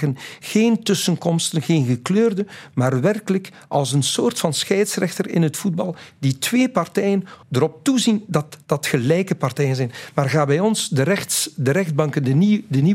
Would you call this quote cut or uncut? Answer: cut